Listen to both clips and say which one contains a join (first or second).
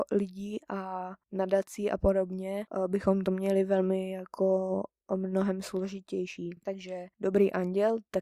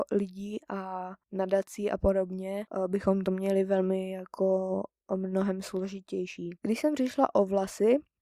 second